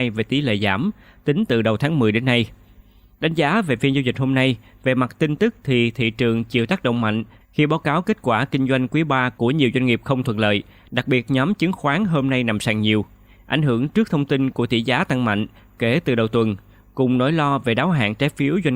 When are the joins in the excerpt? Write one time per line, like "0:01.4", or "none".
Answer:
none

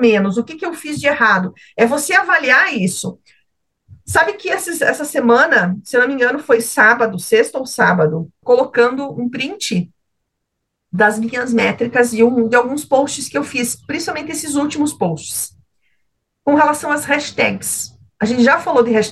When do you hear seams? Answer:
0:08.4

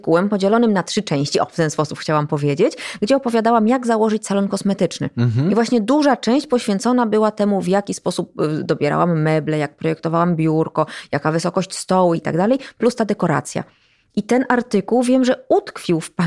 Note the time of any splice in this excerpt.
0:12.2

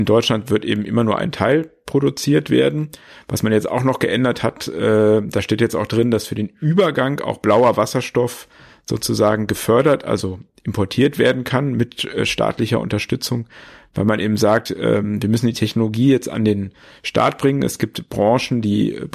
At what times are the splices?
none

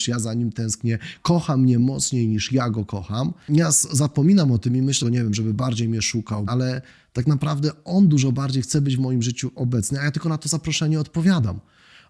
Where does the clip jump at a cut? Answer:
0:05.0
0:06.5

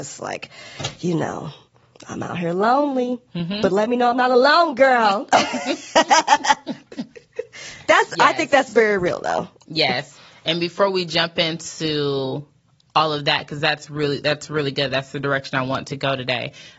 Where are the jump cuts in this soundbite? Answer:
none

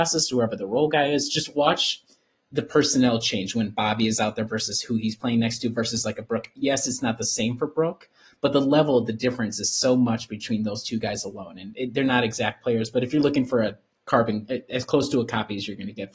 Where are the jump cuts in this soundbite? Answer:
none

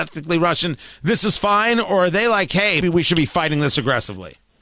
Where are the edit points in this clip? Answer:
0:02.8

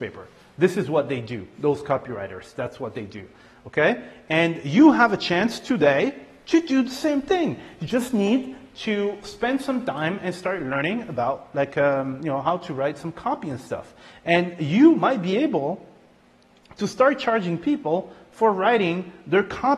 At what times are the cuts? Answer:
none

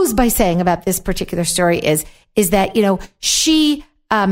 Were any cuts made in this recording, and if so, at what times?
none

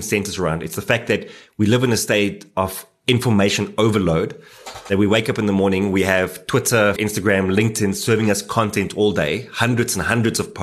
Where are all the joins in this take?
0:07.0

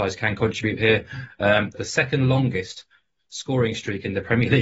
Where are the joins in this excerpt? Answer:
0:01.7

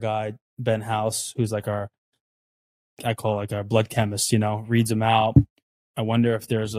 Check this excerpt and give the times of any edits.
0:05.8

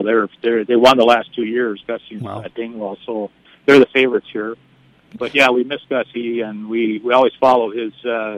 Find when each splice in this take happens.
none

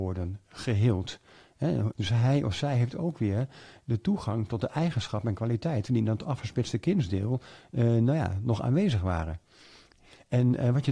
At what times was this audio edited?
0:01.9

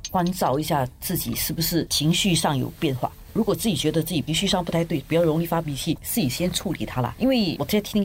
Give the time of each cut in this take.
none

